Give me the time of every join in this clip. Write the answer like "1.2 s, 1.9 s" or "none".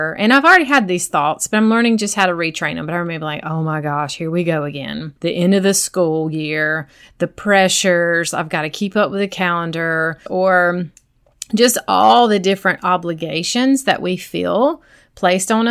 5.2 s, 10.3 s